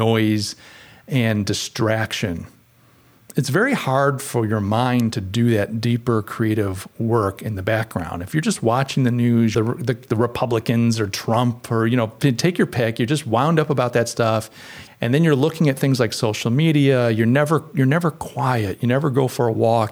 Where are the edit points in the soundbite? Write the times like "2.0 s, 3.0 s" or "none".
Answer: 9.5 s, 14.9 s